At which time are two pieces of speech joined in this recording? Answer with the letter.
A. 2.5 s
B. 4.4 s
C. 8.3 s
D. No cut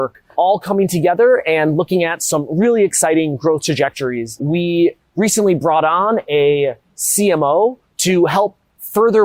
B